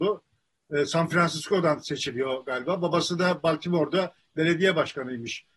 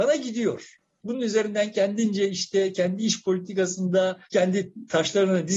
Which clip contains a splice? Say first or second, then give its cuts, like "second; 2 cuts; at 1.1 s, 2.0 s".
second; 2 cuts; at 1.0 s, 4.3 s